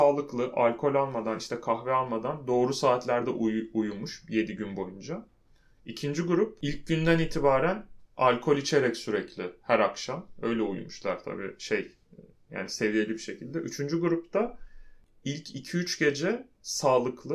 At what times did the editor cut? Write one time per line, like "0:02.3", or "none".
none